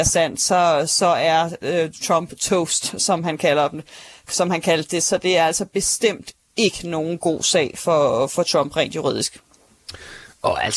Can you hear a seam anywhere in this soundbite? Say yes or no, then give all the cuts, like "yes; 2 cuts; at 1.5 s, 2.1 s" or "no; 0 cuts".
no; 0 cuts